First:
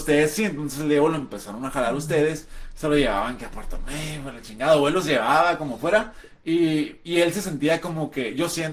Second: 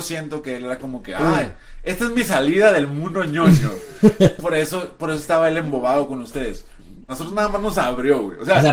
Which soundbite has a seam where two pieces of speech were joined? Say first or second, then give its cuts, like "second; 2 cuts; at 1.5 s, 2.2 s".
second; 2 cuts; at 4.4 s, 7.1 s